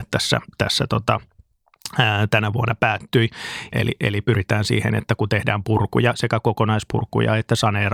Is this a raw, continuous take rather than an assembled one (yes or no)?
no